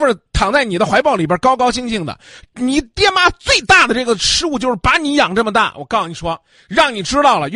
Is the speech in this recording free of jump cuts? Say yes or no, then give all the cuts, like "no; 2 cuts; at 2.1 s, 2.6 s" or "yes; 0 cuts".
yes; 0 cuts